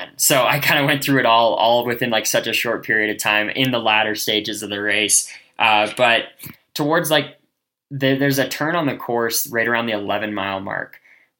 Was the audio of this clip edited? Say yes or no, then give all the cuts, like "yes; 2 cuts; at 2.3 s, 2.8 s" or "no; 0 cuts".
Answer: no; 0 cuts